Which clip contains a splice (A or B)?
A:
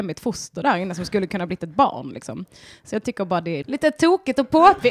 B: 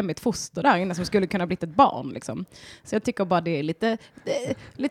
A